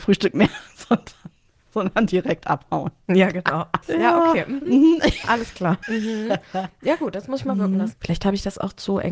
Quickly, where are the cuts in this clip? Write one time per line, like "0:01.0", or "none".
0:03.8
0:05.8
0:07.9